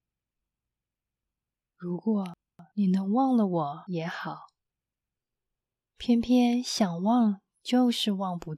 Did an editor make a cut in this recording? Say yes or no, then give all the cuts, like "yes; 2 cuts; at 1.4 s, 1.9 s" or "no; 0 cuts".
no; 0 cuts